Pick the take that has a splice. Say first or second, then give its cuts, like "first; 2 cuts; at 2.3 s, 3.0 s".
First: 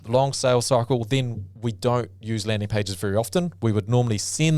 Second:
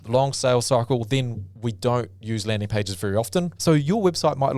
second; 1 cut; at 3.6 s